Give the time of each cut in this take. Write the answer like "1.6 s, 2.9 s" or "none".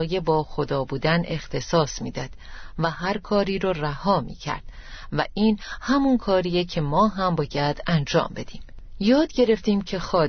none